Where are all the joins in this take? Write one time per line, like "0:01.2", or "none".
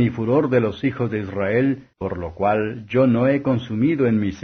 0:01.9